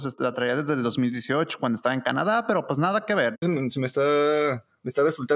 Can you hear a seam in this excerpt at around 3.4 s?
yes; 1 cut; at 3.4 s

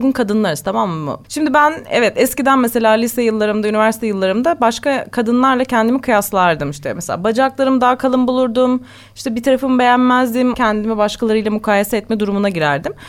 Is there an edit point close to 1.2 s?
yes; 2 cuts; at 1.2 s, 10.5 s

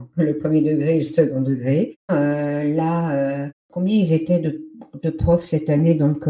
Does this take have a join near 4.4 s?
no; 1 cut; at 2.1 s

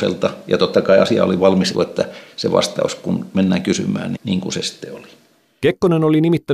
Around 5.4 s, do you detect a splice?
no; 2 cuts; at 1.7 s, 4.2 s

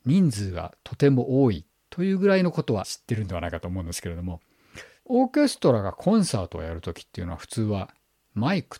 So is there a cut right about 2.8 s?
yes; 1 cut; at 2.8 s

